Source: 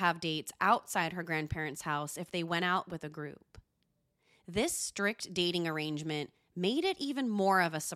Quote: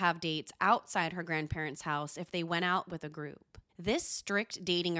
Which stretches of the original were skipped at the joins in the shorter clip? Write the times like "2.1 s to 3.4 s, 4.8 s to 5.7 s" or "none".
3.7 s to 4.4 s